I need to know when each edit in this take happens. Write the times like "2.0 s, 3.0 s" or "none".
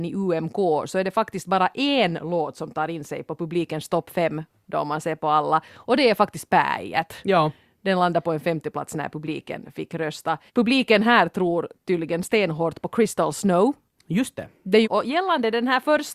10.5 s, 14.8 s